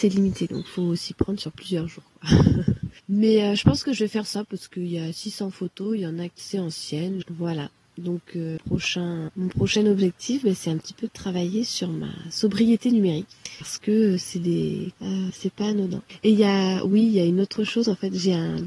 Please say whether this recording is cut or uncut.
cut